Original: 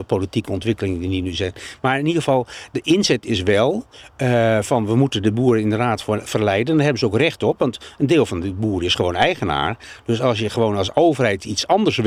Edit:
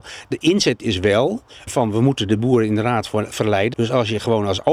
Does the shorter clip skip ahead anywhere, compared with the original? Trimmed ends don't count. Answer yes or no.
yes